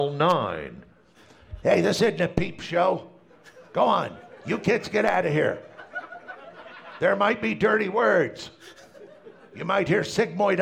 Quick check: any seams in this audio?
no; 0 cuts

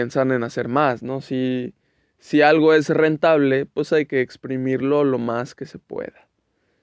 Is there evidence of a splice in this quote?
no; 0 cuts

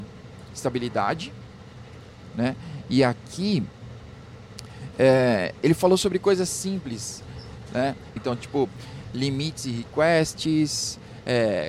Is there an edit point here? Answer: yes; 1 cut; at 8.2 s

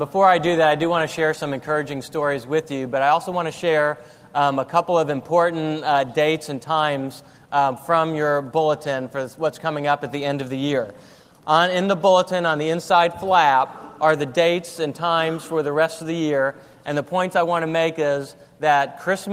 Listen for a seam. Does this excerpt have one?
no; 0 cuts

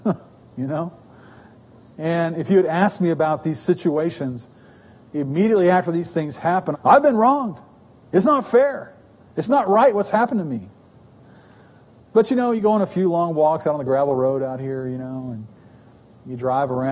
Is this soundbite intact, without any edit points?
no; 1 cut; at 6.7 s

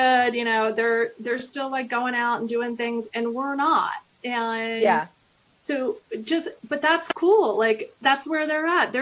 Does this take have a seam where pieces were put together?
no; 0 cuts

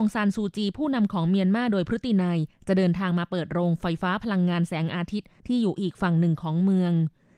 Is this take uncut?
yes; 0 cuts

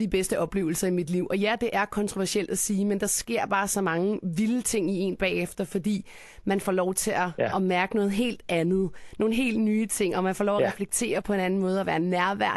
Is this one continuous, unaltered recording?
yes; 0 cuts

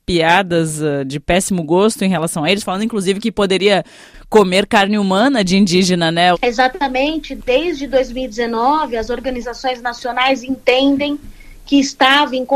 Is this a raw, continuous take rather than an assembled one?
no; 1 cut; at 6.3 s

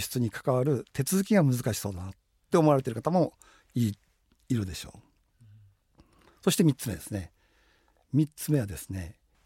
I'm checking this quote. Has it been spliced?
no; 0 cuts

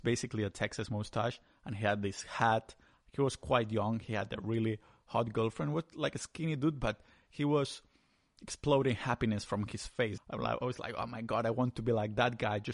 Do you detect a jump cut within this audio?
yes; 1 cut; at 10.2 s

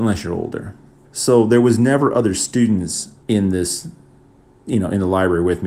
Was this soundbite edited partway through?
yes; 2 cuts; at 1.1 s, 3.2 s

